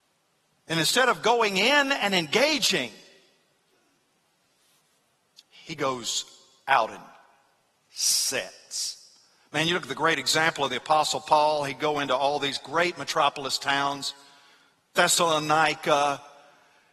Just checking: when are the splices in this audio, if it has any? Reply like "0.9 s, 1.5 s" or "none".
none